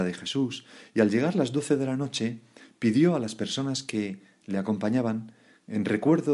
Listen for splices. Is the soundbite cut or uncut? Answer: uncut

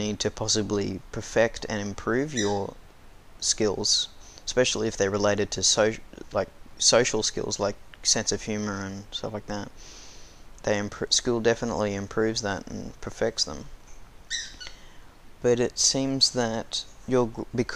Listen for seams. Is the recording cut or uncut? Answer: uncut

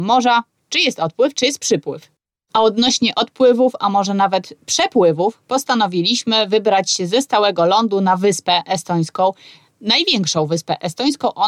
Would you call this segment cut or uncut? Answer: uncut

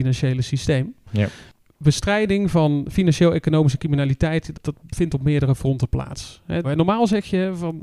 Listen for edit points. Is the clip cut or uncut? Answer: cut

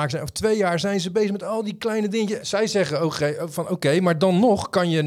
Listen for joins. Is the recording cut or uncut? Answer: cut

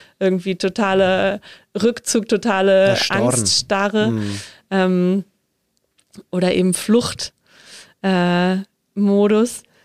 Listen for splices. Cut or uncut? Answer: uncut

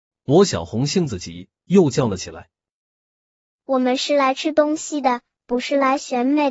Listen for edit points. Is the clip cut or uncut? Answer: uncut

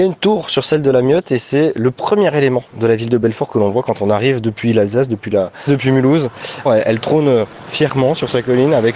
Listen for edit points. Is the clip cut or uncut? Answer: cut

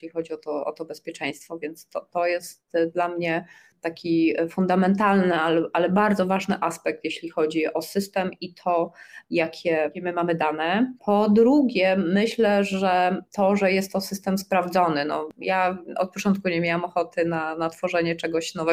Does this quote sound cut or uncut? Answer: cut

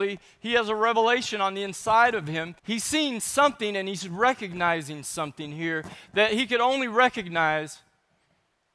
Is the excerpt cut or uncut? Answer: cut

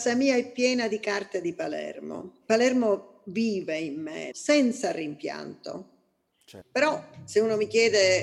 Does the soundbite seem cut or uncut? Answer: cut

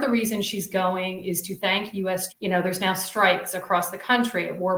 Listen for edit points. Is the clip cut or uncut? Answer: cut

